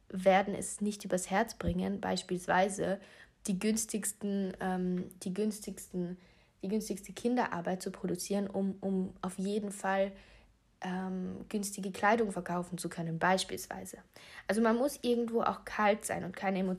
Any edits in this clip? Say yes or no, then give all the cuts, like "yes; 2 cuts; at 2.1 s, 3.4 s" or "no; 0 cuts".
no; 0 cuts